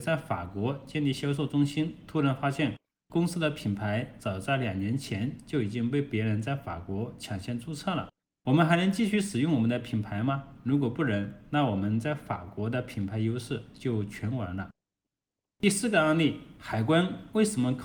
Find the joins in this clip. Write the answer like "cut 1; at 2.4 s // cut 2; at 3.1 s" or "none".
none